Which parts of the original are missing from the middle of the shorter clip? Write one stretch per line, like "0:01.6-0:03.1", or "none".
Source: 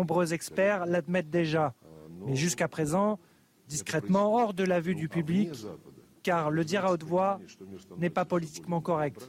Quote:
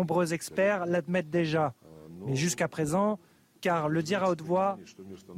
0:03.6-0:06.2